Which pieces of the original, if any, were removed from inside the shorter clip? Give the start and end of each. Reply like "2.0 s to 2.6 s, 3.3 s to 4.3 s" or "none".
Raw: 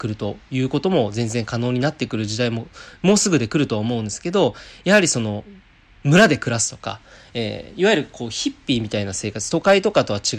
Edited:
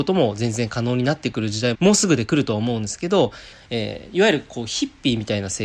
2.5 s to 3.0 s, 4.7 s to 7.2 s